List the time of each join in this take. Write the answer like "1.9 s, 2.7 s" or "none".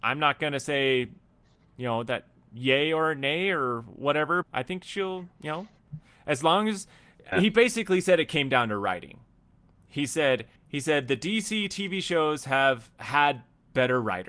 4.4 s, 7.3 s, 10.6 s